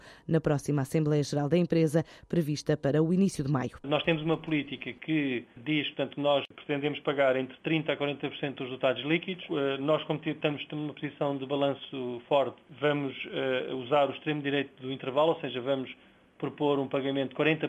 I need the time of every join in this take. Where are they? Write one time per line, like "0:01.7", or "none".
none